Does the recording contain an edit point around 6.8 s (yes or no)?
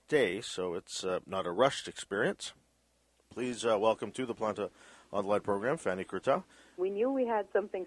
yes